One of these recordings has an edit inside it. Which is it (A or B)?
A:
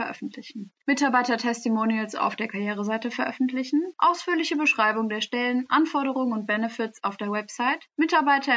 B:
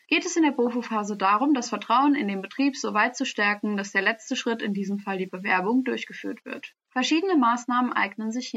B